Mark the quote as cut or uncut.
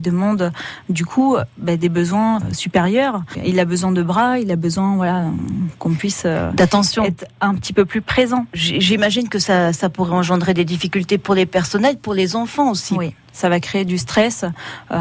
uncut